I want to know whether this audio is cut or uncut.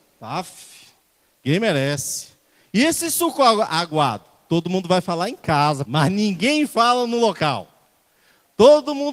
cut